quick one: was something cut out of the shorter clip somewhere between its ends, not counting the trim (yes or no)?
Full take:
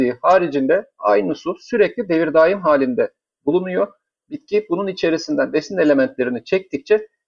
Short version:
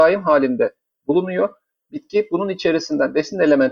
no